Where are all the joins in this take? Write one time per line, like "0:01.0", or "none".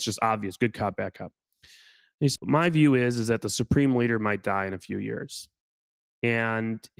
0:02.4